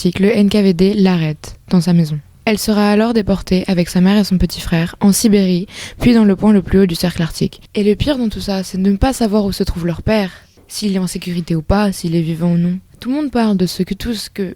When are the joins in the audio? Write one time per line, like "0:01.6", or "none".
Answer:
0:07.7
0:12.9